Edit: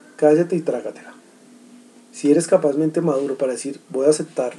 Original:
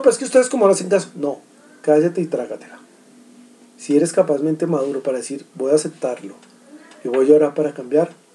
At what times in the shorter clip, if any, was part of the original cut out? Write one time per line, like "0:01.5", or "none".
none